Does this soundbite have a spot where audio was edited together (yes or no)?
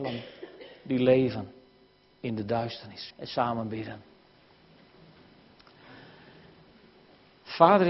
yes